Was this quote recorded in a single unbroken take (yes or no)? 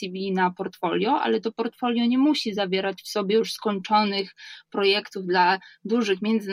yes